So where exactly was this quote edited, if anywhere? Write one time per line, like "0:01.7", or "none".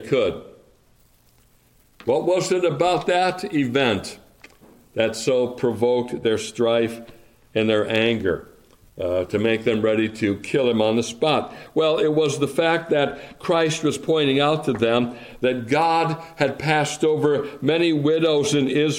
none